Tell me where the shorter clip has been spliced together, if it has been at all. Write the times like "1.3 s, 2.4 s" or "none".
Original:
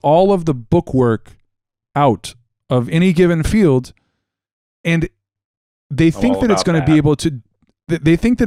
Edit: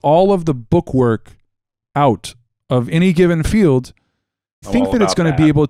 4.6 s